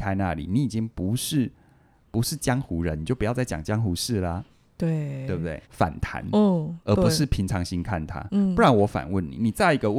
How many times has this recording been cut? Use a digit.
1